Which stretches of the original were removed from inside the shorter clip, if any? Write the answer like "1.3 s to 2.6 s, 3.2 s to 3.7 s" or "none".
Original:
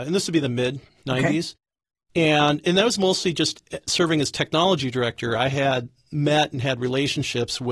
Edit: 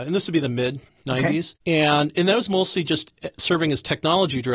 1.6 s to 2.1 s